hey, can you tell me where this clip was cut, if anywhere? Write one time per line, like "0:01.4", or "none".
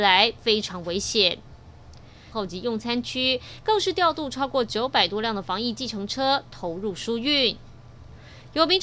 0:02.3